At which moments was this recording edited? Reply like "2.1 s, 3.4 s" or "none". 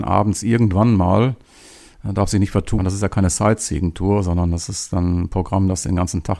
2.8 s